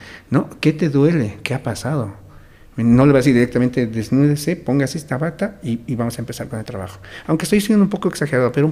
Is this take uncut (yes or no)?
yes